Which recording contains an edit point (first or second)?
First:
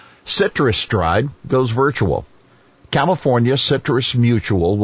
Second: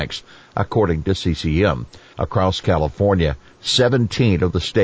second